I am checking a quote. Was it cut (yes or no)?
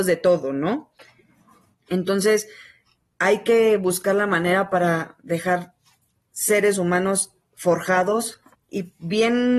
yes